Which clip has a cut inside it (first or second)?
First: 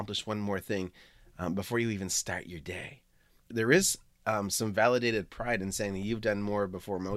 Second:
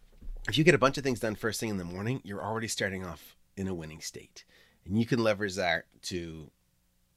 first